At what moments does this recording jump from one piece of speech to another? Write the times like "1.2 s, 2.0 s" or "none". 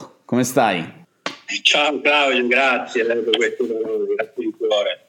none

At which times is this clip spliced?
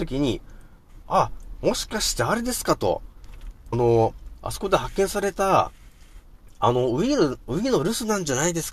3.7 s

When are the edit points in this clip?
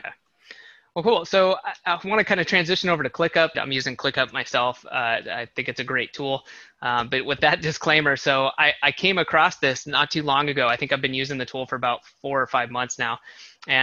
3.5 s

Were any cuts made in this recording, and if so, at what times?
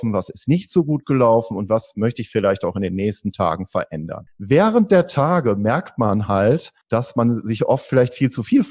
4.3 s, 6.8 s

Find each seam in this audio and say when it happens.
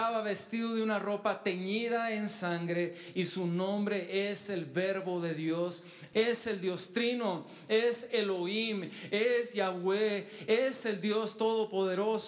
6.1 s

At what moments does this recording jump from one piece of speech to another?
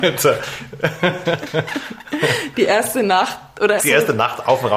3.8 s

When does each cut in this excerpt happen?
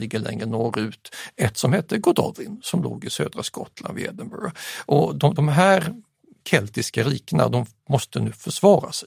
none

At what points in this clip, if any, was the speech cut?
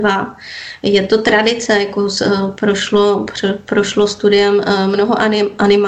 none

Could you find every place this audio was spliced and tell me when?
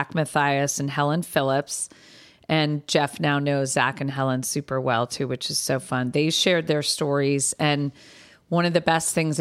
none

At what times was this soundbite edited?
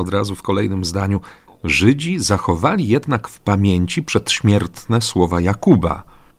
none

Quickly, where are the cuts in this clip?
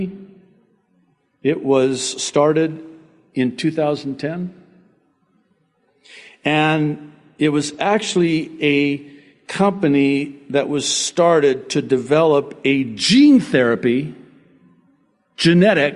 none

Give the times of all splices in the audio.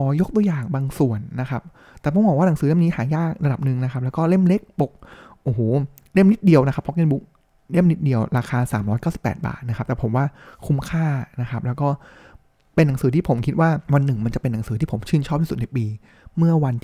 13.8 s

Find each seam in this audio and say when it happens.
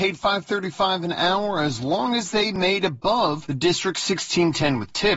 none

